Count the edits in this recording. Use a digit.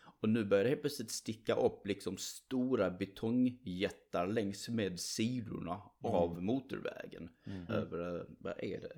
1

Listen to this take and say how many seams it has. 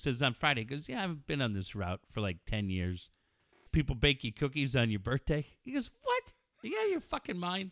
1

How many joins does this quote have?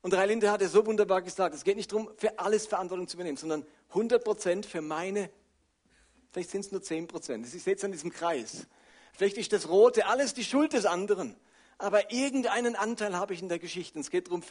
0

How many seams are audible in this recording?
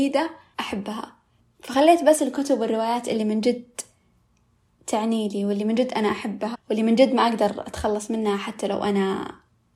1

